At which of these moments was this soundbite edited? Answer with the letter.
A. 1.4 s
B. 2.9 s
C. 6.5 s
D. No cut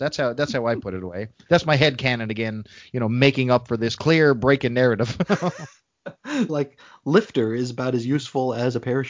C